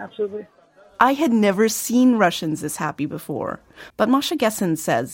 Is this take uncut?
no; 1 cut; at 3.9 s

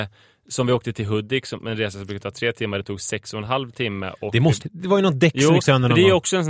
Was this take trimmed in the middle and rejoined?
yes; 1 cut; at 4.6 s

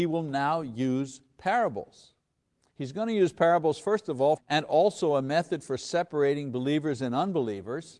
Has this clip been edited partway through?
yes; 1 cut; at 4.4 s

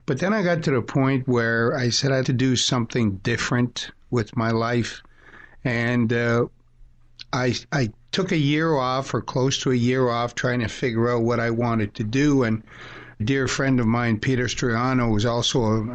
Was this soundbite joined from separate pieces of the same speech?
yes; 2 cuts; at 2.2 s, 13.2 s

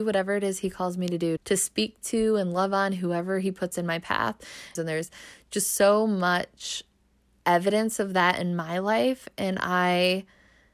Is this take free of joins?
no; 2 cuts; at 1.4 s, 4.8 s

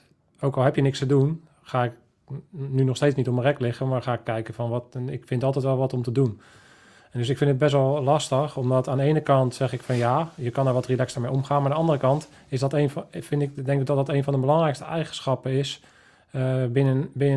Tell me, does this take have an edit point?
no; 0 cuts

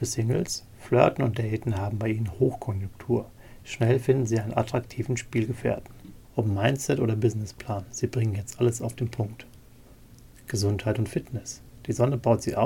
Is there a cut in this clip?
yes; 1 cut; at 6.2 s

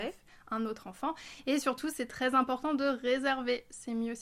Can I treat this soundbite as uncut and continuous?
yes; 0 cuts

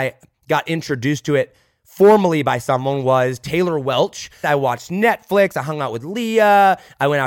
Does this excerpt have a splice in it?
yes; 1 cut; at 4.4 s

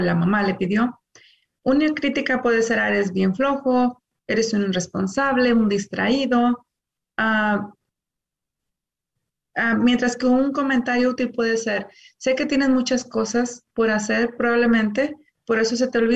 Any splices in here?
no; 0 cuts

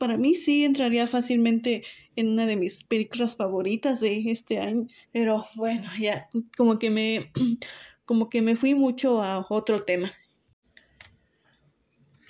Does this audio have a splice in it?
yes; 1 cut; at 5.0 s

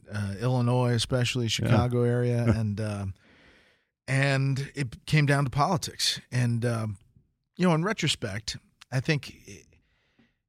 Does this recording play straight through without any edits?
yes; 0 cuts

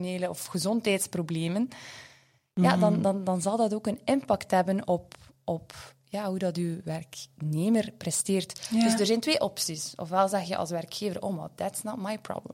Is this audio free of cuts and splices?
yes; 0 cuts

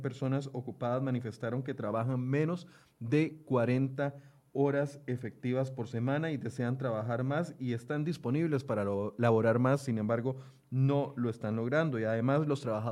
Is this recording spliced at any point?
no; 0 cuts

